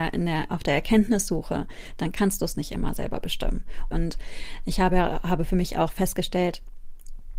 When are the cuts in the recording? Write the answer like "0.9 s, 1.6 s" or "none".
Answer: 3.9 s